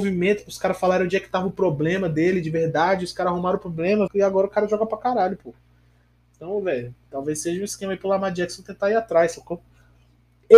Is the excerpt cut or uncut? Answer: cut